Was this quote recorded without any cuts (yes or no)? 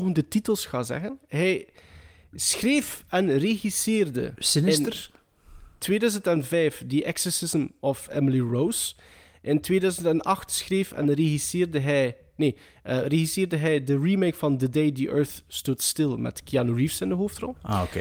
yes